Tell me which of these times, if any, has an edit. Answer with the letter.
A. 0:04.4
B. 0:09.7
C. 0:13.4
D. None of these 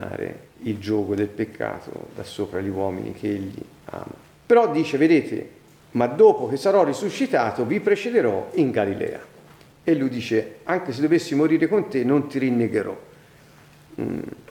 B